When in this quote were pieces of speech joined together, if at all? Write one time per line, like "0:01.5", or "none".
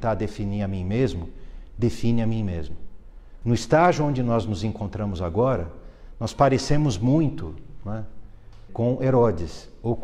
0:03.4
0:08.7